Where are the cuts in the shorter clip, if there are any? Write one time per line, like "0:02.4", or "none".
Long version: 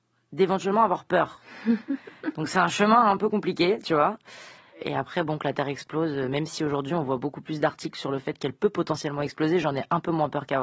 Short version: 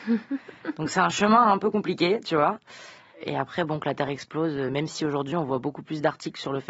none